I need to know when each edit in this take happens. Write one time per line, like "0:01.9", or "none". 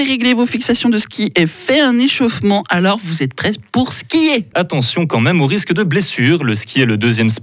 0:04.5